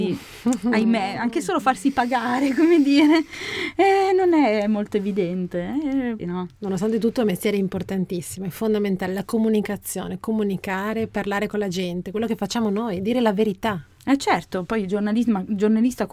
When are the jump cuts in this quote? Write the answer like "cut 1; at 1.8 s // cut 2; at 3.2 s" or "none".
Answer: cut 1; at 6.2 s

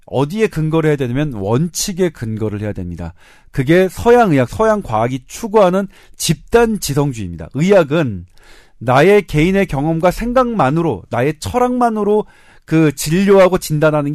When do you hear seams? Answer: cut 1; at 4.5 s

